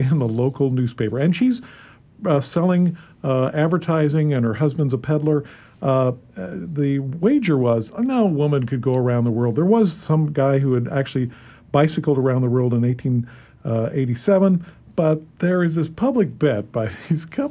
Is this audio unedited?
yes; 0 cuts

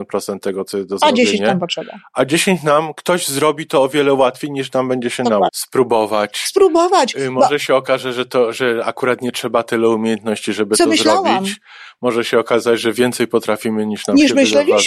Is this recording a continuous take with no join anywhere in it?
no; 1 cut; at 5.5 s

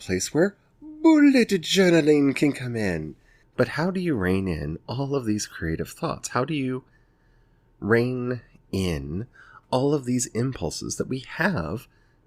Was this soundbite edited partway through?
yes; 1 cut; at 3.4 s

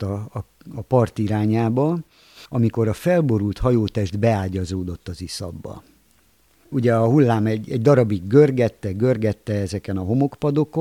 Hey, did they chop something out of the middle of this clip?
no; 0 cuts

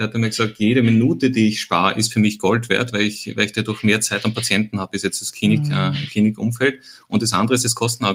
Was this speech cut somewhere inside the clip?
no; 0 cuts

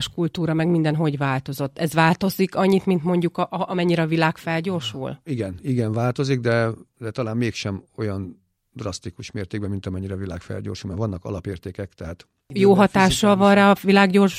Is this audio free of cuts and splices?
yes; 0 cuts

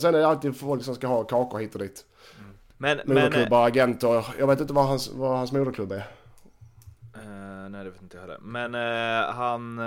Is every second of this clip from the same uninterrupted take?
yes; 0 cuts

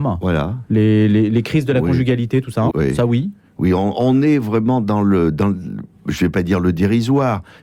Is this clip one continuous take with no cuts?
no; 1 cut; at 2.7 s

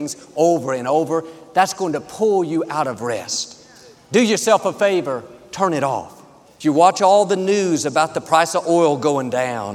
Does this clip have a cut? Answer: yes; 1 cut; at 6.4 s

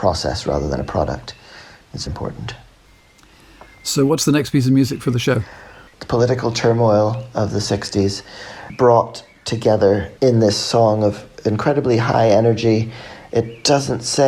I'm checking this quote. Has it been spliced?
yes; 3 cuts; at 2.1 s, 5.9 s, 10.2 s

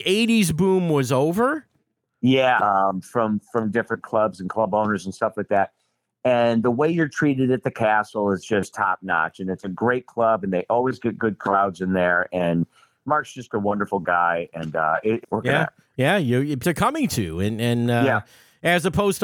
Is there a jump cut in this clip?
yes; 3 cuts; at 2.6 s, 15.2 s, 16.6 s

